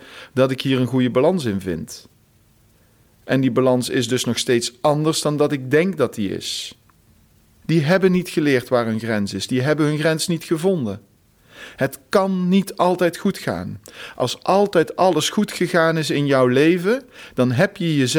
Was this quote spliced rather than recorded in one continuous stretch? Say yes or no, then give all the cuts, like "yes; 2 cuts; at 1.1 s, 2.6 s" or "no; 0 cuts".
yes; 1 cut; at 7.6 s